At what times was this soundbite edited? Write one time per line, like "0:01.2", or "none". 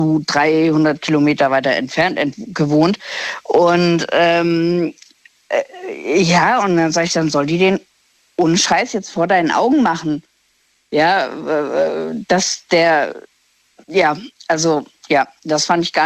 none